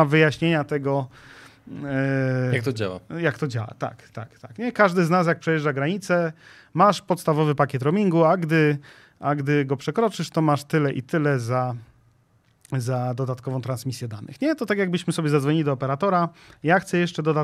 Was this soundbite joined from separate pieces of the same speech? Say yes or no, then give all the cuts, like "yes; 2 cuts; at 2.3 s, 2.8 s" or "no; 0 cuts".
no; 0 cuts